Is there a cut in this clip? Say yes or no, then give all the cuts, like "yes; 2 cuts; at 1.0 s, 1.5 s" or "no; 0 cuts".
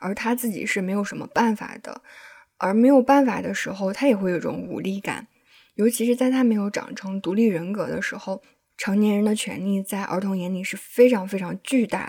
no; 0 cuts